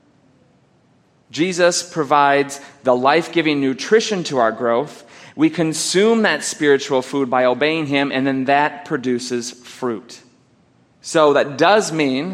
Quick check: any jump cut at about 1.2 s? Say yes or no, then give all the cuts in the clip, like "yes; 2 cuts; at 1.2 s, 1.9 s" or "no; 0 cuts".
no; 1 cut; at 10.9 s